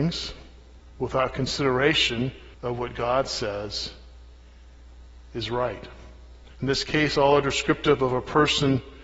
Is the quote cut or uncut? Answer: cut